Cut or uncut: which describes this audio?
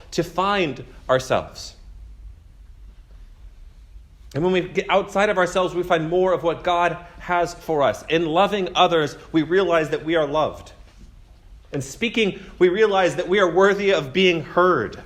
uncut